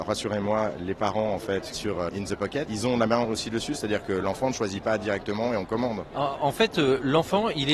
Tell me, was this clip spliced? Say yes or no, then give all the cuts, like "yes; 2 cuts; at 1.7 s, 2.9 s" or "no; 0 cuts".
yes; 1 cut; at 2.7 s